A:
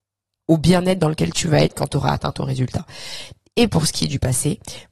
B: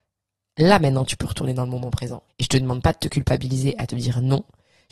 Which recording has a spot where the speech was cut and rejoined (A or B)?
B